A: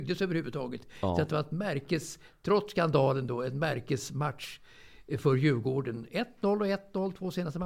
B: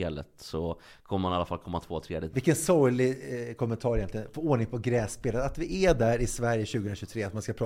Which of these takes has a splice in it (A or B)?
B